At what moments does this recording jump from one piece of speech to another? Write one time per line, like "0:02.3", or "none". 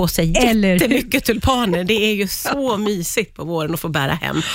none